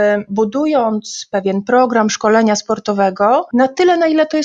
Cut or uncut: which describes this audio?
uncut